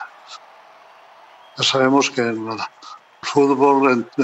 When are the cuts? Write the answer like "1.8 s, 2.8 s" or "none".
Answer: 3.2 s